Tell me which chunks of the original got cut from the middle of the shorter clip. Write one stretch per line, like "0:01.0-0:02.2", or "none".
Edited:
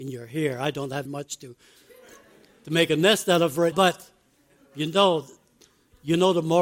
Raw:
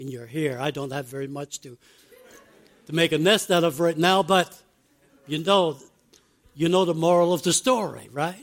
0:01.1-0:01.3
0:03.9-0:04.2